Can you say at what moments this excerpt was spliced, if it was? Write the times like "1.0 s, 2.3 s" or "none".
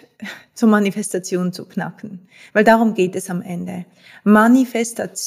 none